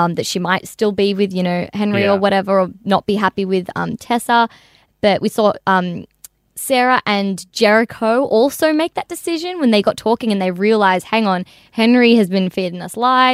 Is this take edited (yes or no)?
no